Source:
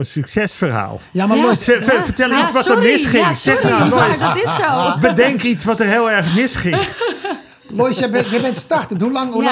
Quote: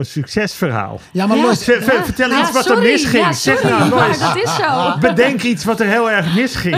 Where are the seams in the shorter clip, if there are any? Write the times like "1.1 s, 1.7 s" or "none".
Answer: none